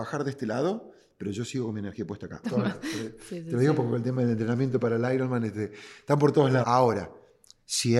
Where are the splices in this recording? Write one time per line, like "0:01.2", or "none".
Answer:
0:02.4
0:06.6